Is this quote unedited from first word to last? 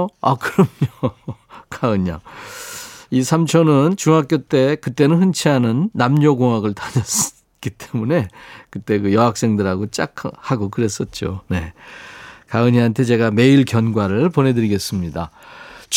yes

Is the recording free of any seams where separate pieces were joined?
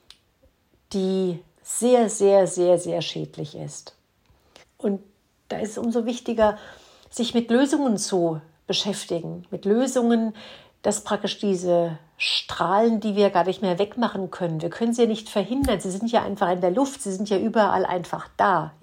no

